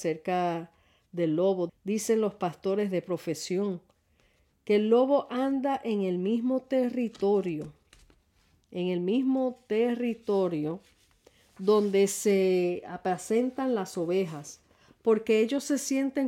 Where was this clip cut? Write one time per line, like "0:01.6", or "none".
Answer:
0:01.7